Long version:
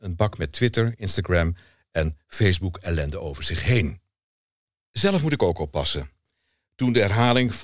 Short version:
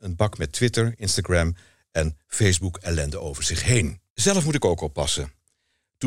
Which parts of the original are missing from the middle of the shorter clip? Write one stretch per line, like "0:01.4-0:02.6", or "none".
0:04.1-0:04.9